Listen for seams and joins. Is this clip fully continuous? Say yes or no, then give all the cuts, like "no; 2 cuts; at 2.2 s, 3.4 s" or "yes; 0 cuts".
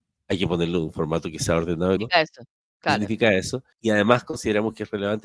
no; 2 cuts; at 2.0 s, 3.7 s